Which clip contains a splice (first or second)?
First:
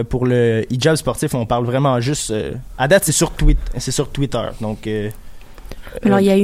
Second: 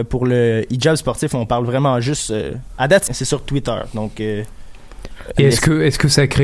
second